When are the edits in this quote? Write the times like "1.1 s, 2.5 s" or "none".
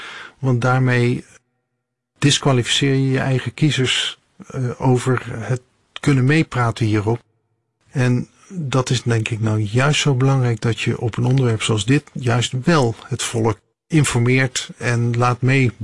none